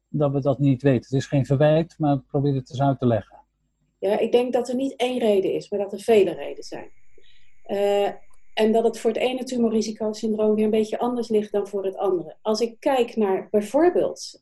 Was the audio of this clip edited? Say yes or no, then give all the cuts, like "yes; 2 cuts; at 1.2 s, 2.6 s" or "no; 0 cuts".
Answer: no; 0 cuts